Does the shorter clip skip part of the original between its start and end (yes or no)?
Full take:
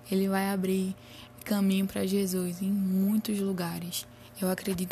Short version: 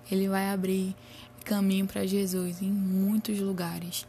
no